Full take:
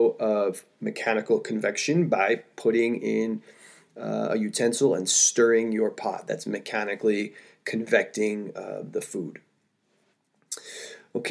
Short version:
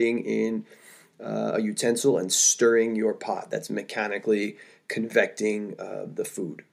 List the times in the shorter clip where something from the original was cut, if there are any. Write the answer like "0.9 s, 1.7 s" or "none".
none